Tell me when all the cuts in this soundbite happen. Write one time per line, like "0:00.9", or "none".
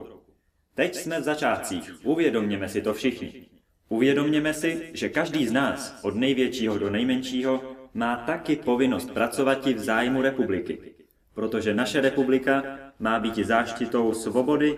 none